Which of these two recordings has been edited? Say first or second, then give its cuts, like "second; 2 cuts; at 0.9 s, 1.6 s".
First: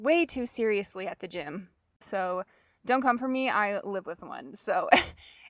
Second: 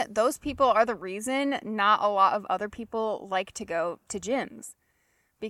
first; 1 cut; at 2.0 s